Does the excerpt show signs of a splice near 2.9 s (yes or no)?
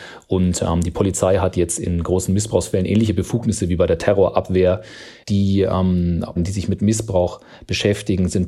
no